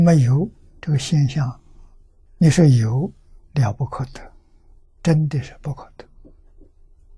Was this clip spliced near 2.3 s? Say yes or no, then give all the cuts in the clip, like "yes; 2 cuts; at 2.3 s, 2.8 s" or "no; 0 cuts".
yes; 1 cut; at 2.3 s